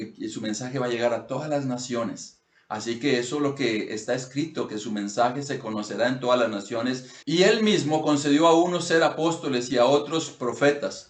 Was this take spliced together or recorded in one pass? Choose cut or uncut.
cut